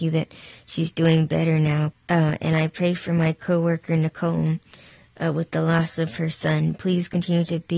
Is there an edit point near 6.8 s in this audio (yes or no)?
no